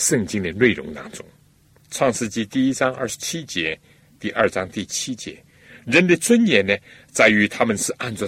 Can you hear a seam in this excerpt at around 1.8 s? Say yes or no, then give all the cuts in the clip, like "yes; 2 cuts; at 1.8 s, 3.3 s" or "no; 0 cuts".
yes; 1 cut; at 1.8 s